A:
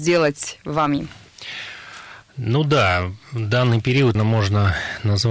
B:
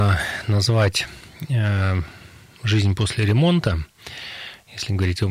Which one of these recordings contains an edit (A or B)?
A